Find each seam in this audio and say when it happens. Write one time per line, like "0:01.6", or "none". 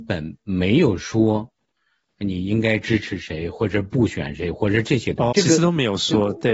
0:05.3